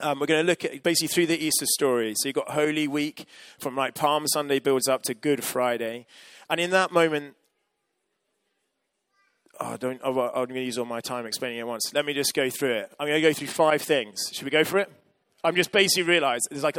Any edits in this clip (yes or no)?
no